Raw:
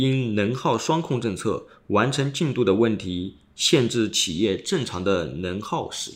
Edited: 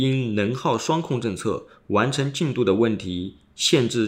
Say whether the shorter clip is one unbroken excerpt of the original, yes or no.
yes